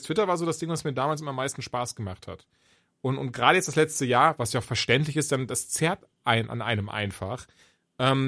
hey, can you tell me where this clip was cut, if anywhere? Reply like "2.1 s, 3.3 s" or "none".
none